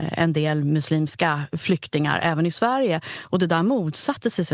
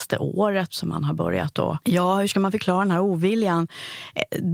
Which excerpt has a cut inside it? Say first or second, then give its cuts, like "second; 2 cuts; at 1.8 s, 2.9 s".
second; 1 cut; at 1.8 s